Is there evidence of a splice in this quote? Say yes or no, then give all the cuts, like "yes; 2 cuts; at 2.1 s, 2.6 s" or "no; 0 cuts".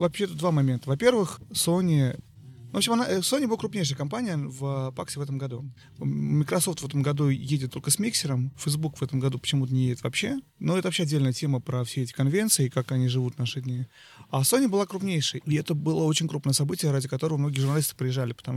yes; 2 cuts; at 10.5 s, 15.4 s